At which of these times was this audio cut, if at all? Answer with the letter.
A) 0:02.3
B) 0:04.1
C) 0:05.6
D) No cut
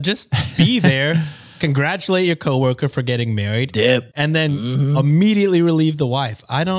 B